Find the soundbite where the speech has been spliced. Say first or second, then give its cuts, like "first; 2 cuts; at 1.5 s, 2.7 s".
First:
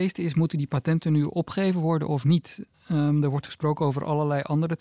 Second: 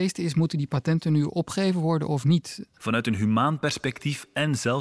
second; 1 cut; at 2.8 s